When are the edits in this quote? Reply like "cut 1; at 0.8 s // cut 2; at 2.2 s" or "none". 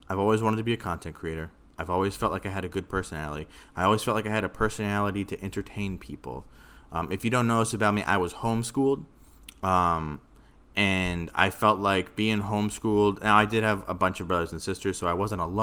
none